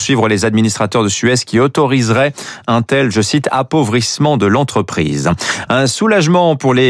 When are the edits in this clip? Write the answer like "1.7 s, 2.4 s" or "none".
none